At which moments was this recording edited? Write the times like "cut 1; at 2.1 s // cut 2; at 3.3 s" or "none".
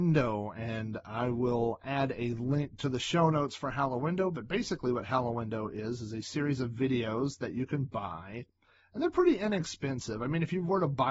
none

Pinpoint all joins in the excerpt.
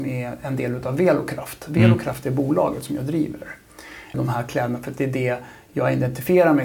cut 1; at 4.1 s

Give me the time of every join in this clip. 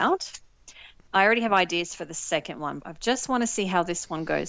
cut 1; at 2.8 s

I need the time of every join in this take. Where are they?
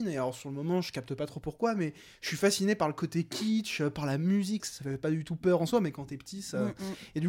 cut 1; at 4.6 s

